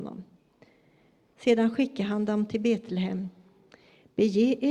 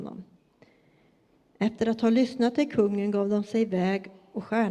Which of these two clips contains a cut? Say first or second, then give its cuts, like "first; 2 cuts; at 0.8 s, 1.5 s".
first; 1 cut; at 1.3 s